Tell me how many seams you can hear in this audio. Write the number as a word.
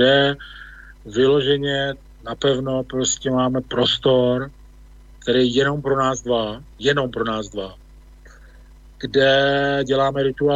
one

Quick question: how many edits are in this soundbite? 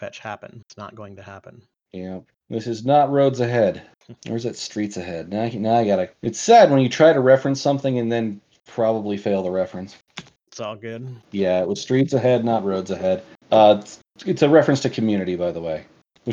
two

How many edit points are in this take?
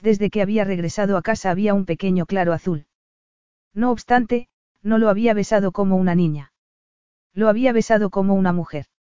one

